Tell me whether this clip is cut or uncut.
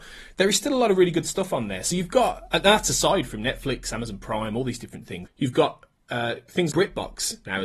cut